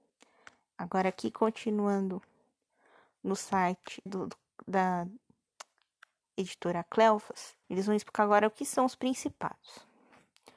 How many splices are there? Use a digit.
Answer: 2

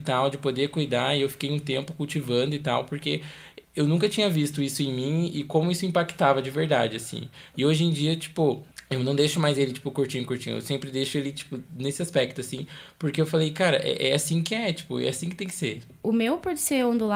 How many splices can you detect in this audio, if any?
0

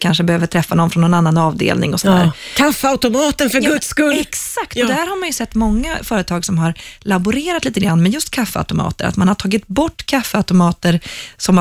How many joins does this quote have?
0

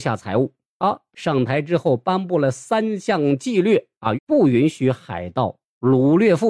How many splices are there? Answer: 2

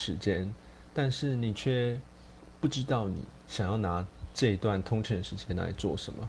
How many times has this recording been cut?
0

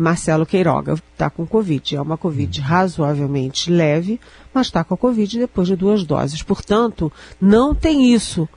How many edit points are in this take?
1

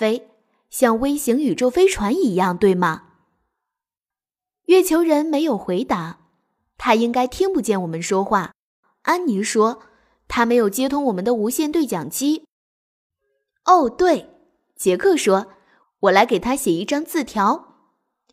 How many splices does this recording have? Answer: 0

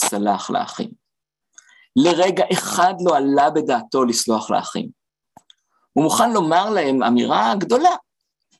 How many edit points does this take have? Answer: 0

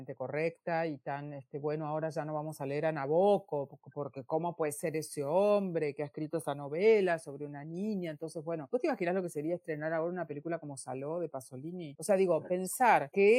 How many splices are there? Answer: 0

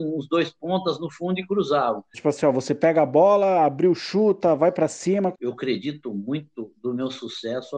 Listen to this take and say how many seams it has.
2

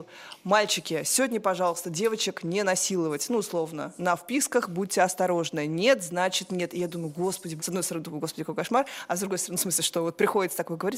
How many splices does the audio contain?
1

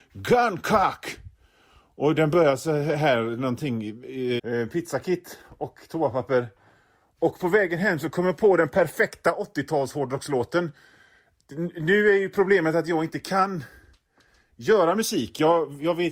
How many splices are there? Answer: 1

